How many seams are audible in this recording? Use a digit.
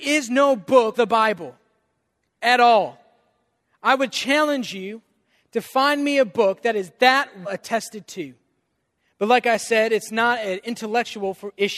2